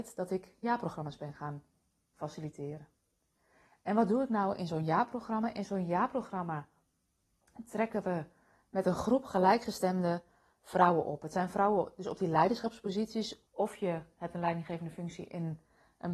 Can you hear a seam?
yes; 1 cut; at 13.5 s

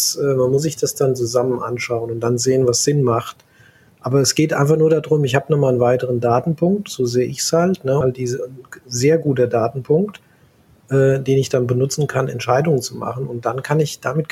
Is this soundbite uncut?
no; 1 cut; at 8.0 s

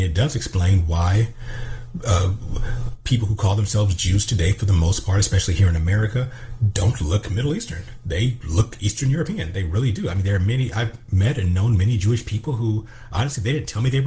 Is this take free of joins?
yes; 0 cuts

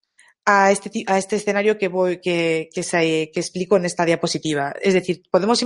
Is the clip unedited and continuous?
yes; 0 cuts

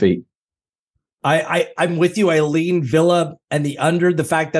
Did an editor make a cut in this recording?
yes; 1 cut; at 1.2 s

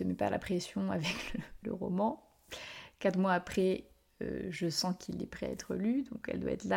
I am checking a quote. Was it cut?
no; 0 cuts

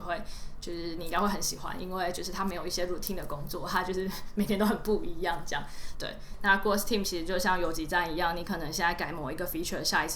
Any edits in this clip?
yes; 1 cut; at 5.9 s

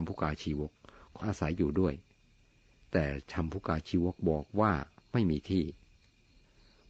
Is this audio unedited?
no; 1 cut; at 1.2 s

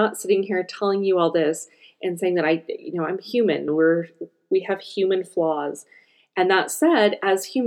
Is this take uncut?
no; 1 cut; at 3.7 s

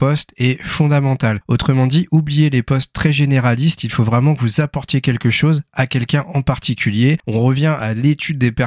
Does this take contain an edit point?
no; 0 cuts

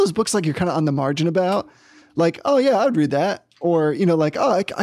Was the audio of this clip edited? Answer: no; 0 cuts

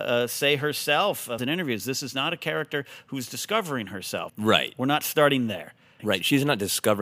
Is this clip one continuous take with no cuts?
no; 3 cuts; at 1.4 s, 4.3 s, 6.0 s

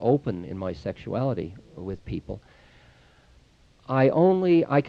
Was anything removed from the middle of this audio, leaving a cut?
no; 0 cuts

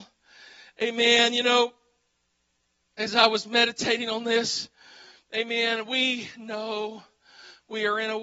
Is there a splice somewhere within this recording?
no; 0 cuts

